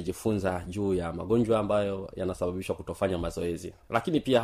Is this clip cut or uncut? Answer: uncut